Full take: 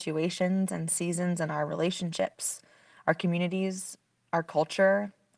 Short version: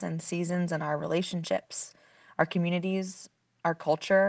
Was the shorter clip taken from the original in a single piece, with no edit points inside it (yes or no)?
yes